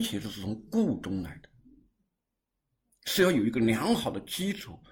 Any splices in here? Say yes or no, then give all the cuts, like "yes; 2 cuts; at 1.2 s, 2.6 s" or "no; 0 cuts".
no; 0 cuts